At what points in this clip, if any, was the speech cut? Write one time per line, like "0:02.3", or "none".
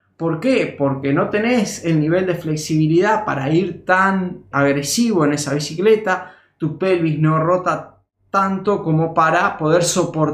0:04.5